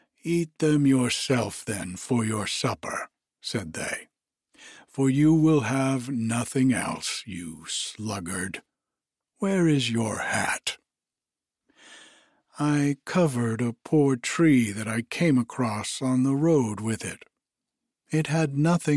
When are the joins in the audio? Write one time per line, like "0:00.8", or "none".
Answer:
none